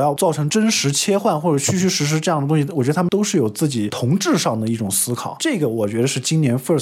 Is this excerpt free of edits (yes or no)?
yes